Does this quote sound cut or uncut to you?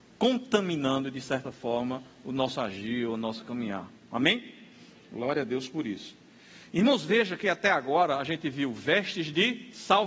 uncut